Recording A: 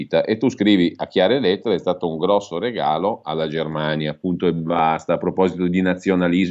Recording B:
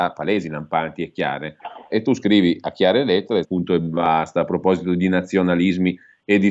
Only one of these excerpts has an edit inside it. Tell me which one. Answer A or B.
B